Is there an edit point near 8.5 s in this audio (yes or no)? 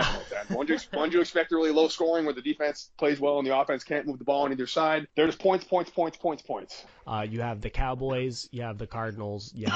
no